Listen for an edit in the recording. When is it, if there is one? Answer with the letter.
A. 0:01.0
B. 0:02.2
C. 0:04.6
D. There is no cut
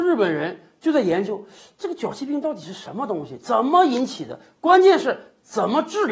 D